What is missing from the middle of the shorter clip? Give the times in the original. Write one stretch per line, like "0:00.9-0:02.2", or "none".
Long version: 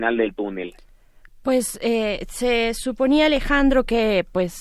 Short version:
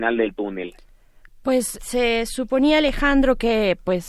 0:01.8-0:02.3

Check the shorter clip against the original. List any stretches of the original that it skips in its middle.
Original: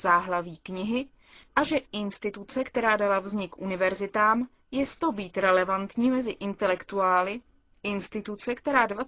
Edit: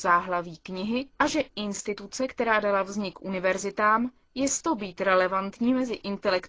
0:01.1-0:01.5

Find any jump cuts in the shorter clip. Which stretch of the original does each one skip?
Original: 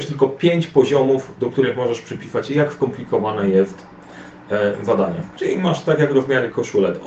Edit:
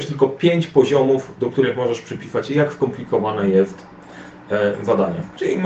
none

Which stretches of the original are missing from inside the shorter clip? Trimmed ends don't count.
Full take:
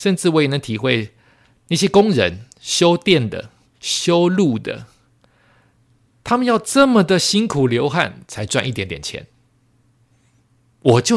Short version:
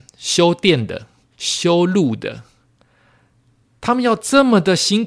none

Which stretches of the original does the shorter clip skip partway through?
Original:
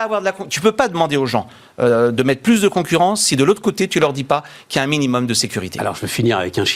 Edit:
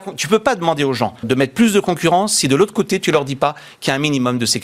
0:01.6-0:02.1

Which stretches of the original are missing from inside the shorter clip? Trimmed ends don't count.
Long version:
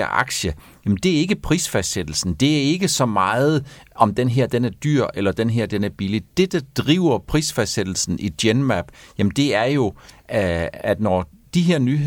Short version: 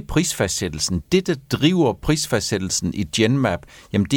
0:02.4-0:06.3

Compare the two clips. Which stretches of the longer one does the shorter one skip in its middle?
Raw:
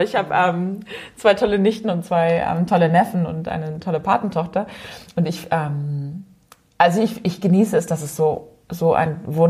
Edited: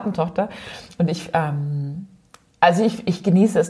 none

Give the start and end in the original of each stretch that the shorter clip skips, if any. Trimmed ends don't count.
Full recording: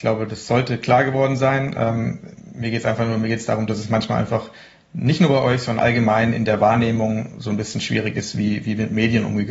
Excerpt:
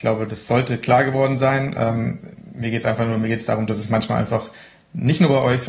none

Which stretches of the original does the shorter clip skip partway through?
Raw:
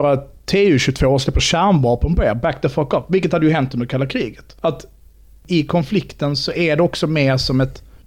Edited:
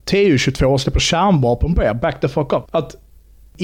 0:03.1-0:04.6

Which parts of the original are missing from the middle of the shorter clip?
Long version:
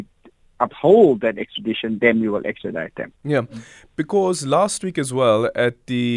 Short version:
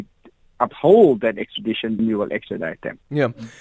0:02.0-0:02.1

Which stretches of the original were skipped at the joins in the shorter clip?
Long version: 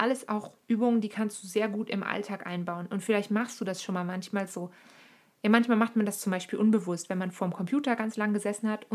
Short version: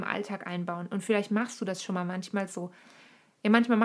none

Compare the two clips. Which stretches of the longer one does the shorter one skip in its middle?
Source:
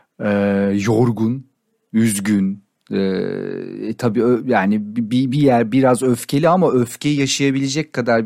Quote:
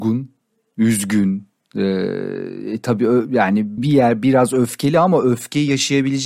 0:04.9-0:05.3

